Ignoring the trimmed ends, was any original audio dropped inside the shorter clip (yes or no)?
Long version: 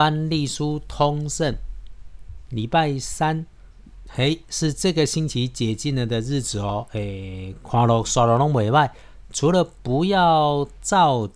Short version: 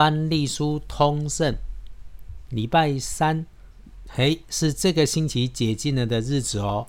no